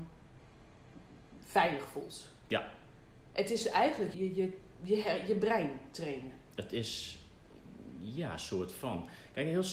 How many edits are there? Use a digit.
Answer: 1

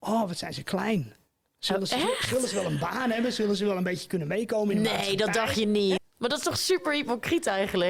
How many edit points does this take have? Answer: 1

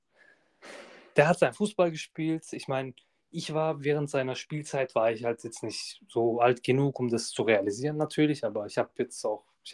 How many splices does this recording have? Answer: 0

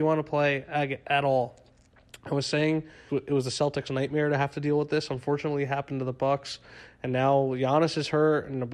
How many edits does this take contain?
1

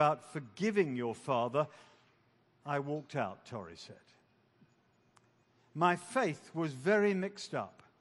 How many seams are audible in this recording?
0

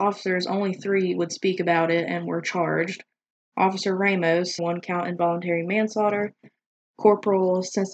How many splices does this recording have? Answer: 1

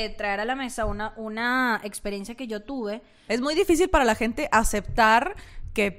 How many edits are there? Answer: 1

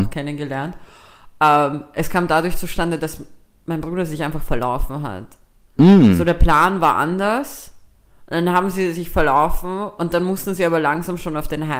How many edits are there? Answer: 0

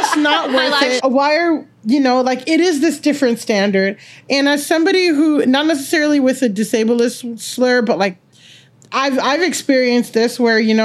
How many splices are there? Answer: 1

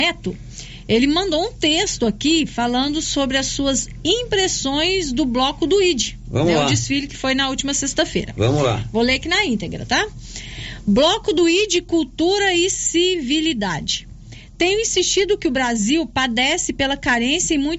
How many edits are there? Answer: 0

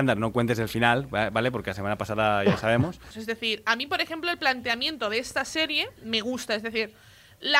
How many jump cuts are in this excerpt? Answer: 1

